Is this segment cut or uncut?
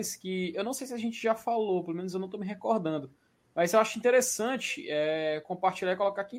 uncut